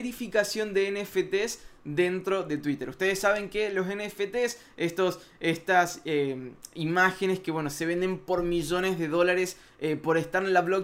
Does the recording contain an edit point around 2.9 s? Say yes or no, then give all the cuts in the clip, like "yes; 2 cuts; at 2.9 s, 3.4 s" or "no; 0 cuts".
no; 0 cuts